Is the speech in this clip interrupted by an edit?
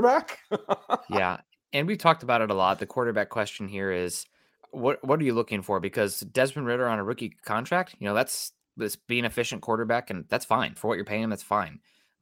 yes; 1 cut; at 10.8 s

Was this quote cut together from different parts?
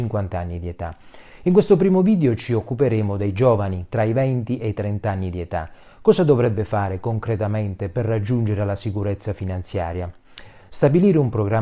no; 0 cuts

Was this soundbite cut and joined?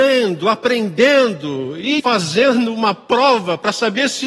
yes; 1 cut; at 2.0 s

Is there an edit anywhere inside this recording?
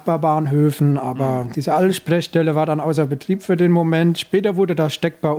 no; 0 cuts

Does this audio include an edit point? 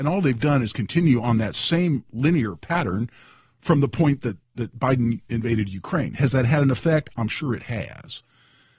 yes; 1 cut; at 4.4 s

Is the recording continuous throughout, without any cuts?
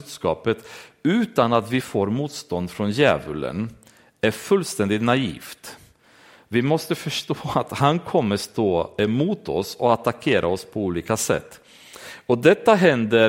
yes; 0 cuts

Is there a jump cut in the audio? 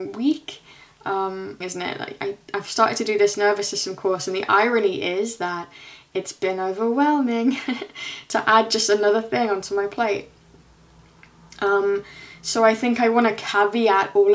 yes; 1 cut; at 1.6 s

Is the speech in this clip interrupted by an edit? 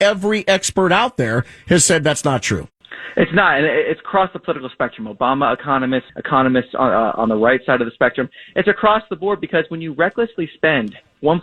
yes; 1 cut; at 6.1 s

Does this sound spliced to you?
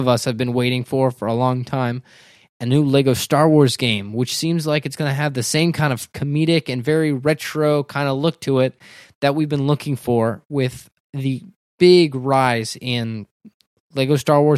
no; 0 cuts

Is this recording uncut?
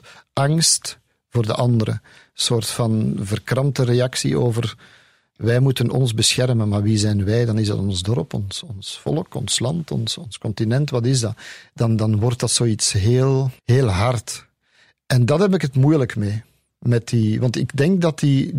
no; 1 cut; at 13.6 s

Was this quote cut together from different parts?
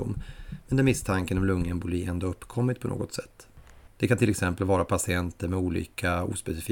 yes; 1 cut; at 3.9 s

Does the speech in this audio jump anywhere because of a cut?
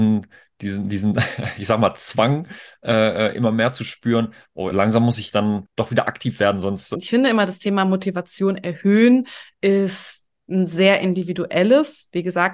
yes; 2 cuts; at 4.7 s, 6.9 s

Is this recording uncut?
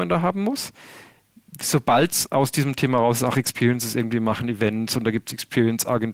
yes; 0 cuts

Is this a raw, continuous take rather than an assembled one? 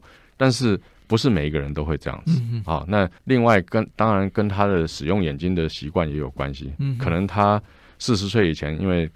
no; 1 cut; at 3.2 s

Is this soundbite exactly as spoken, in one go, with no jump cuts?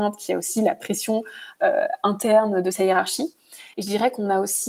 no; 1 cut; at 3.7 s

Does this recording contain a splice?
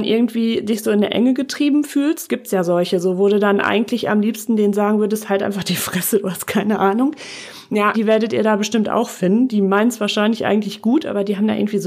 yes; 1 cut; at 7.9 s

